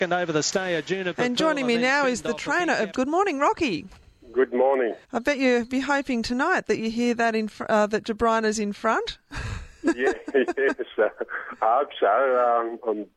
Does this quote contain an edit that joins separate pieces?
yes; 2 cuts; at 2.9 s, 5.0 s

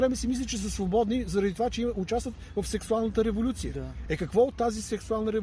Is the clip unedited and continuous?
yes; 0 cuts

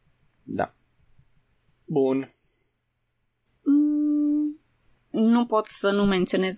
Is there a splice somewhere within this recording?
yes; 1 cut; at 3.5 s

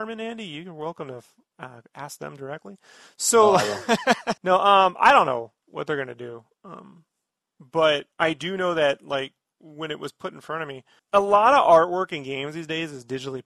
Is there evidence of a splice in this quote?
yes; 3 cuts; at 4.4 s, 8.1 s, 11.0 s

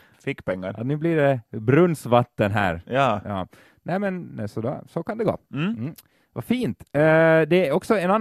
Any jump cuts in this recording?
no; 0 cuts

